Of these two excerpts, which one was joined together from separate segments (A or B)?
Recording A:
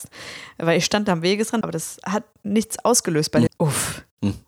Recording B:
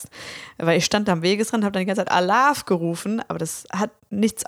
A